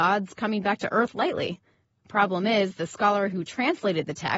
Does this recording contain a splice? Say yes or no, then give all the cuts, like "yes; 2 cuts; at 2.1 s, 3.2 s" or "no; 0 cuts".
no; 0 cuts